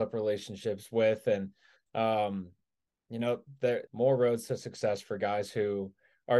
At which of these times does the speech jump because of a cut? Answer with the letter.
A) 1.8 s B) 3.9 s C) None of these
B